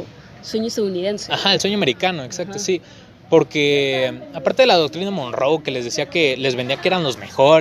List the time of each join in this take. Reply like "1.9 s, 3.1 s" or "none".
none